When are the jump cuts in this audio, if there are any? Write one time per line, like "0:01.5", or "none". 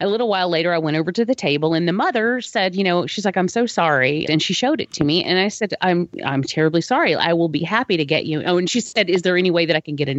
0:04.2